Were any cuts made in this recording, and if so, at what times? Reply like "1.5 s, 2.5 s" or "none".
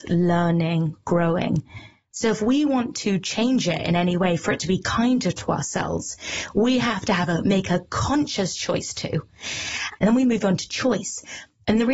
2.1 s, 10.0 s